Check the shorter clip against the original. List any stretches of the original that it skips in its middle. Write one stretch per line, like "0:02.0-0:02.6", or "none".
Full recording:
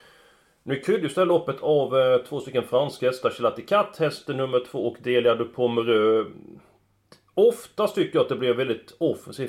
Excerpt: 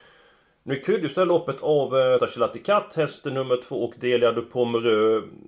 0:02.2-0:03.2